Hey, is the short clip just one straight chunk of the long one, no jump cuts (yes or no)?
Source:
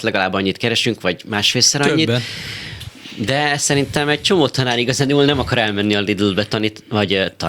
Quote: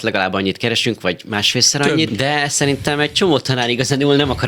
no